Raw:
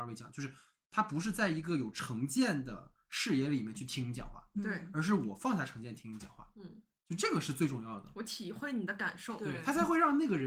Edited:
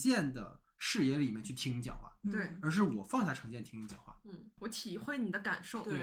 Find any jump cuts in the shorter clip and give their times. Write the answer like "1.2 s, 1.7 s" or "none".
4.6 s